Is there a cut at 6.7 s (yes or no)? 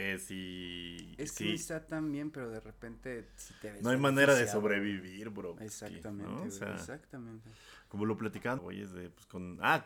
no